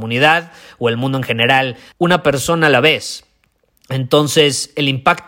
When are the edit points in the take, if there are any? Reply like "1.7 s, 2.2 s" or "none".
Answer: 1.9 s